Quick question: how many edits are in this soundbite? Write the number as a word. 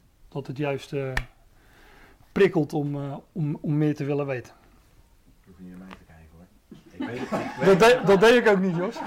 zero